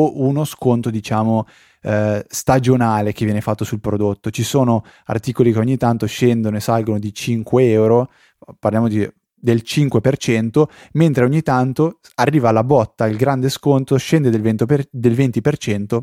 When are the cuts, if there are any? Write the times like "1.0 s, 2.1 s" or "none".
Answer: none